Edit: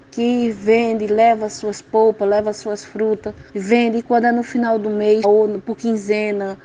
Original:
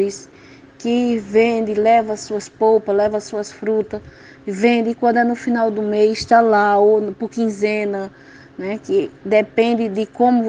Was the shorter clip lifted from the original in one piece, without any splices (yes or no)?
no